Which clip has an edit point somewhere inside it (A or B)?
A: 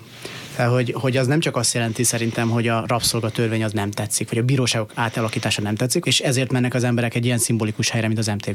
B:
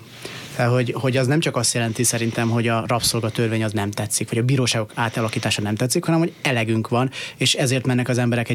A